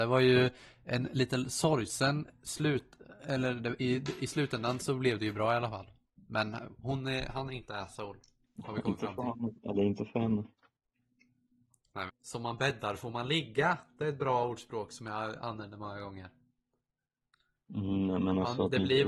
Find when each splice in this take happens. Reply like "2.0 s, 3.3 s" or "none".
12.1 s